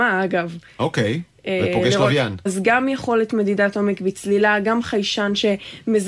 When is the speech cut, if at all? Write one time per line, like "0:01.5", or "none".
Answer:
0:02.5